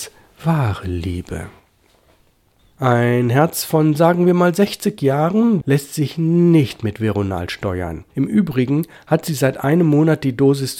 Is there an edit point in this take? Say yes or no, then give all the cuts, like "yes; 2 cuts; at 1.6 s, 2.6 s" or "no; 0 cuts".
yes; 2 cuts; at 2.6 s, 5.6 s